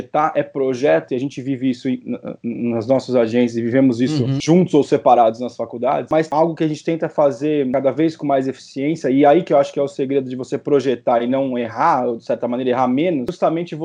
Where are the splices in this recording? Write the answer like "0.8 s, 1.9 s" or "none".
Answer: none